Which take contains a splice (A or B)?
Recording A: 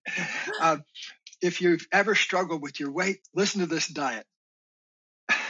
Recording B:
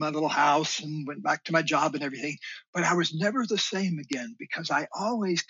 A